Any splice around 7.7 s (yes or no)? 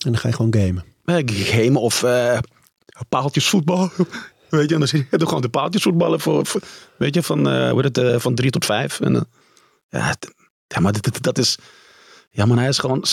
yes